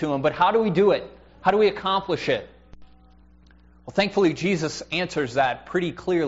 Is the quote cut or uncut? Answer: uncut